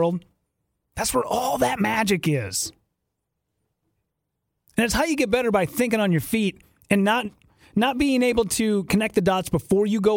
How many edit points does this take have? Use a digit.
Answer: 0